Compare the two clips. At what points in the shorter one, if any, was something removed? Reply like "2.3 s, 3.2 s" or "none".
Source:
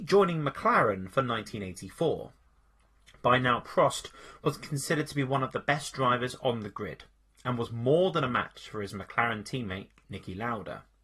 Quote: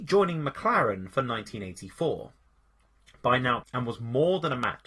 3.6 s